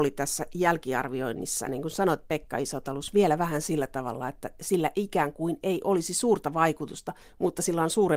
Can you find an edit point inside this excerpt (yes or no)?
yes